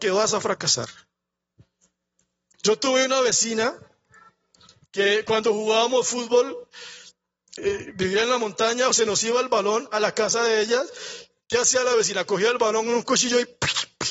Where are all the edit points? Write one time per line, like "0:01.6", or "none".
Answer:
0:02.5
0:07.6
0:08.9

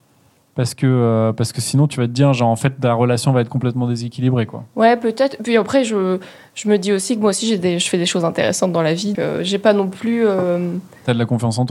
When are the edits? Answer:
0:09.1

